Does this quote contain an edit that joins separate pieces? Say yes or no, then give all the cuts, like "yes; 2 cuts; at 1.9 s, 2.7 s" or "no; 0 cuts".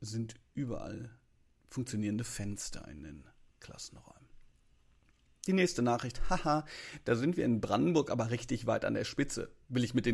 no; 0 cuts